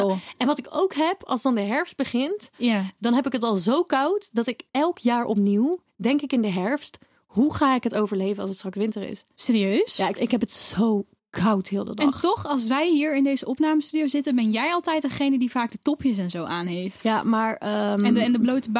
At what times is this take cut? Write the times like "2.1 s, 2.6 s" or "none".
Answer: 10.1 s